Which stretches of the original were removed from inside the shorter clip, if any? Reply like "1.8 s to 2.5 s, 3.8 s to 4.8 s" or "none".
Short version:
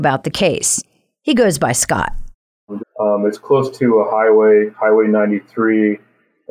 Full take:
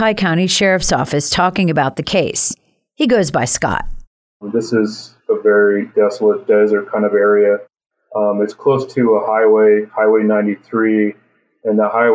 4.5 s to 8.0 s